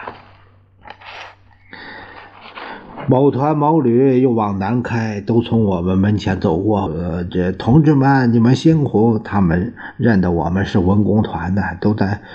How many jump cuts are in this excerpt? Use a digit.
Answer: 1